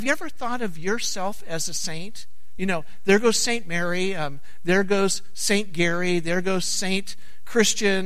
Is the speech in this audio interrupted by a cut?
no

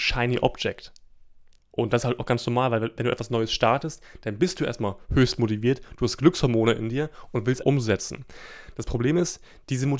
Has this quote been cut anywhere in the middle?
yes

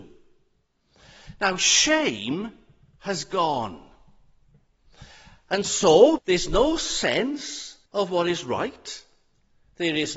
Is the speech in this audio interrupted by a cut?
yes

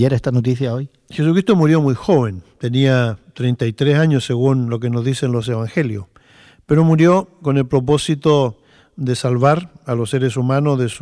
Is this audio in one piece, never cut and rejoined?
yes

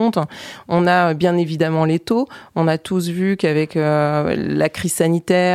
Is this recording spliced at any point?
no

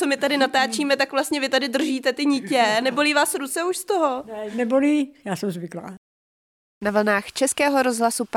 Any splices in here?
no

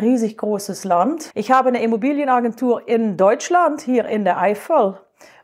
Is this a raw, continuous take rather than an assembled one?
no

